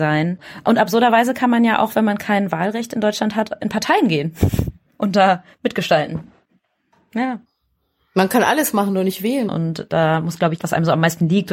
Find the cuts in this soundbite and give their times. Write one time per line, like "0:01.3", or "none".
0:09.5
0:10.6